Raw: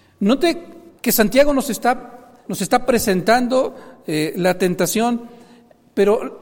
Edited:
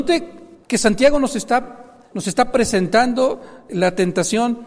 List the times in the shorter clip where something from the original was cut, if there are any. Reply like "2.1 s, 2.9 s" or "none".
3.7 s

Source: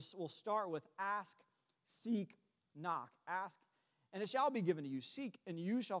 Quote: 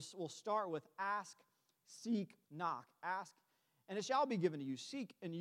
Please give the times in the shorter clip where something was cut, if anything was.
2.4 s

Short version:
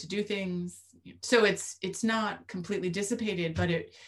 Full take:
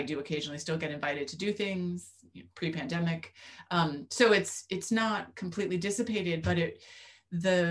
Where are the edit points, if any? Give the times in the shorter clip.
1.2 s

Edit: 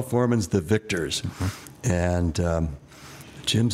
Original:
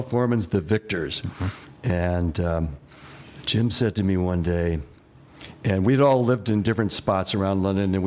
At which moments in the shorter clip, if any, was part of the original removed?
none

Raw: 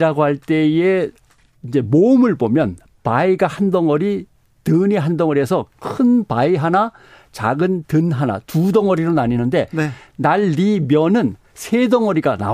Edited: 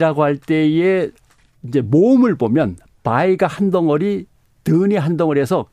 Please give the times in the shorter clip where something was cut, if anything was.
none

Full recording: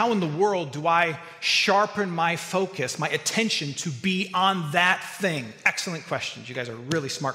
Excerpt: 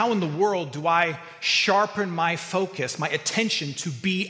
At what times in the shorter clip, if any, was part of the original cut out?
none

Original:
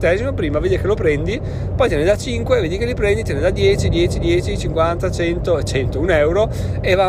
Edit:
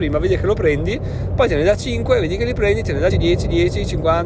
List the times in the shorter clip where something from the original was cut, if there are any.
3.1 s

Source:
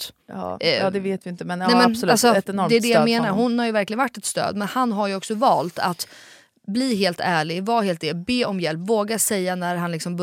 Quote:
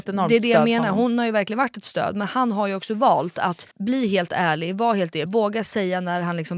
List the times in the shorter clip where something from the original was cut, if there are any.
3.7 s, 5.3 s

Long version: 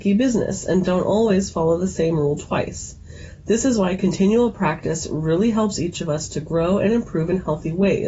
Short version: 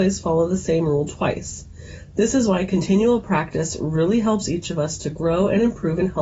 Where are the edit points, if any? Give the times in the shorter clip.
none

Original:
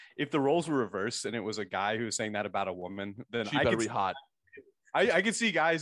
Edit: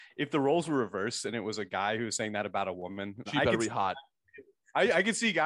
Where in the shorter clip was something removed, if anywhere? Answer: 3.3 s

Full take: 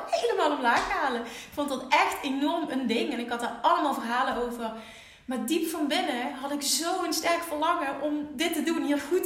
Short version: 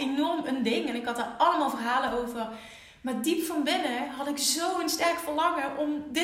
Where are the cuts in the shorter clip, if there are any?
none

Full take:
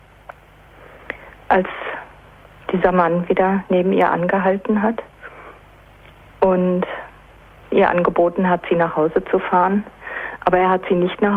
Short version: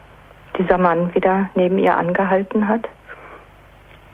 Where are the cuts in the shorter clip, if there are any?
none

